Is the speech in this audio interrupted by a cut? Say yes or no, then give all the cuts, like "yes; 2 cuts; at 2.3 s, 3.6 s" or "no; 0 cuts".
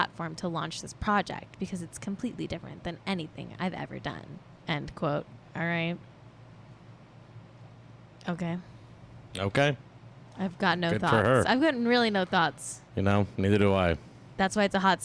no; 0 cuts